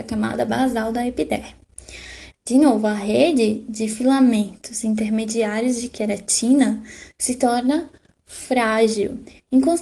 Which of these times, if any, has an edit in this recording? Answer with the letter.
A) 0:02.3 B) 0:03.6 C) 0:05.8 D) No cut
A